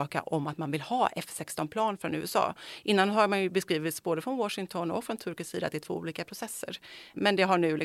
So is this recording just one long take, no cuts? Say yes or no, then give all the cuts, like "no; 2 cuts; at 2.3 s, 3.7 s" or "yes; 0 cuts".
yes; 0 cuts